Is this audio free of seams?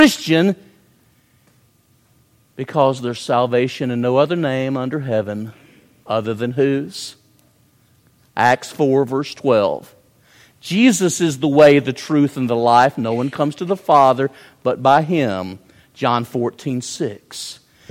yes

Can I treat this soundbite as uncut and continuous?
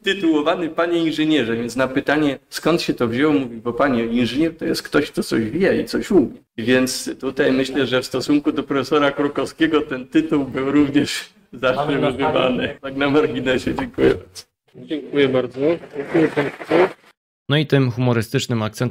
no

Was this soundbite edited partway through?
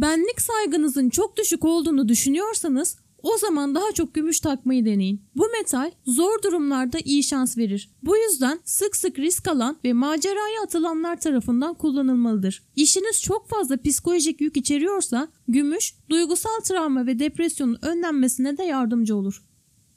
yes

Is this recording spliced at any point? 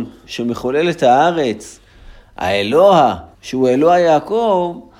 yes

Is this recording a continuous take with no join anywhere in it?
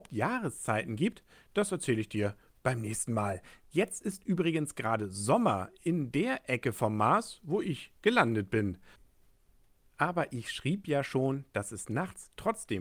yes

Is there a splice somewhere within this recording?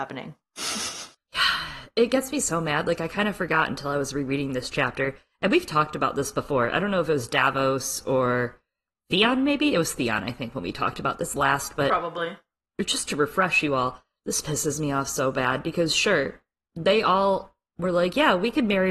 no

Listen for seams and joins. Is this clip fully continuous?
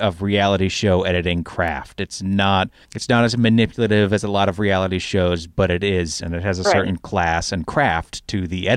no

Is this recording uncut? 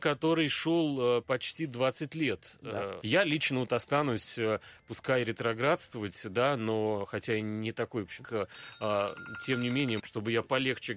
no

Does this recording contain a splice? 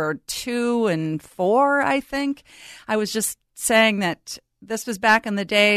no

